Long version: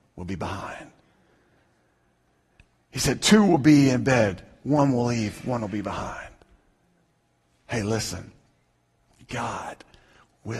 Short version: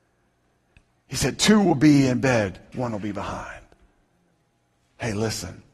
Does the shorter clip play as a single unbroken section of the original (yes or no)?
no